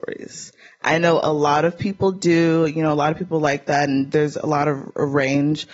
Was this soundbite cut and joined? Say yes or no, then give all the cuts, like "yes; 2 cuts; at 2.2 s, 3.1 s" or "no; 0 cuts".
no; 0 cuts